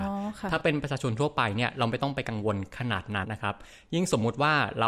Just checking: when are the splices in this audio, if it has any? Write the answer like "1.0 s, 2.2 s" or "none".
3.2 s